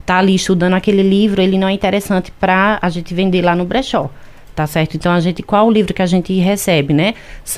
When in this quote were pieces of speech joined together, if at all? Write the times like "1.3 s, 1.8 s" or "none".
none